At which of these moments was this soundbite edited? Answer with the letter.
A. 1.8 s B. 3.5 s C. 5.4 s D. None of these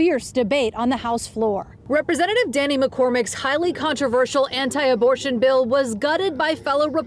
D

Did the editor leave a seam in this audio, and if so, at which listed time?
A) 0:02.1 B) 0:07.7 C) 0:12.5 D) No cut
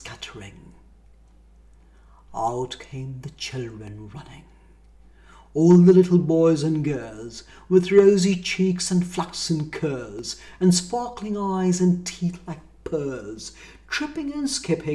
D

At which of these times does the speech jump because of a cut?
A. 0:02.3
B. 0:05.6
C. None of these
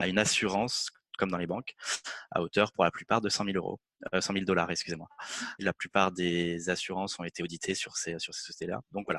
B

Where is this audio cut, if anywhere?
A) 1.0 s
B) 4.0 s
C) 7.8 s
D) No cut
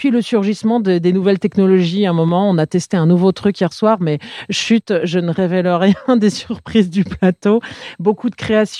D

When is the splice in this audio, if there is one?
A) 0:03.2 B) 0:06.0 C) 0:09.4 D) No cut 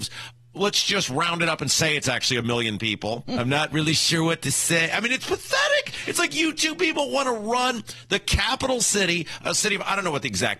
A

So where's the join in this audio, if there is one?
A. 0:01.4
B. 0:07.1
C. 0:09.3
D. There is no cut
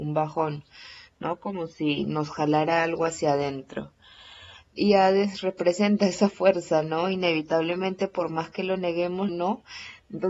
C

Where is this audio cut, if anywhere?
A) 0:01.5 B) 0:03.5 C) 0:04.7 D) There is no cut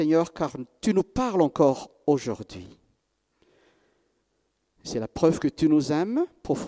D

